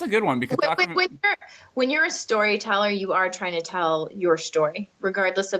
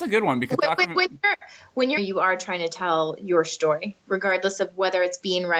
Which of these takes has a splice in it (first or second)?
second